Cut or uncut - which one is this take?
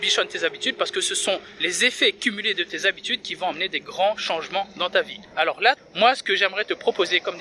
cut